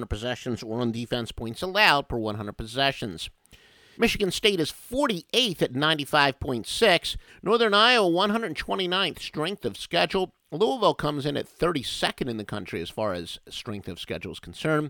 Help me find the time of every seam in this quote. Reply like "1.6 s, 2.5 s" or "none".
3.9 s, 7.3 s